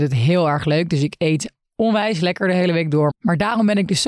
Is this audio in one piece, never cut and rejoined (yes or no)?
no